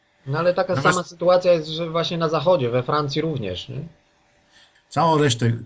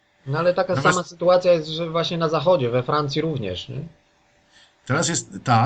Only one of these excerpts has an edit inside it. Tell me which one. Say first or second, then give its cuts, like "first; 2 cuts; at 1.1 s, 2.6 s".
first; 1 cut; at 4.8 s